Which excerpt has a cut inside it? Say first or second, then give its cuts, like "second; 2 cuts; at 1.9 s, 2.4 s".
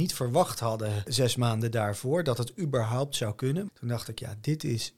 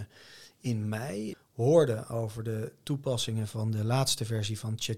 first; 1 cut; at 3.7 s